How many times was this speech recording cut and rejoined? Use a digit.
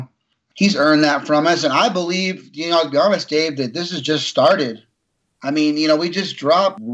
0